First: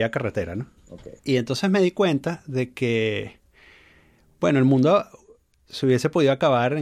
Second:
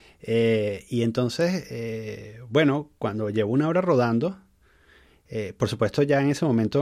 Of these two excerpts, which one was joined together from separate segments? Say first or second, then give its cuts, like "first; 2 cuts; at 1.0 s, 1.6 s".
first; 1 cut; at 1.2 s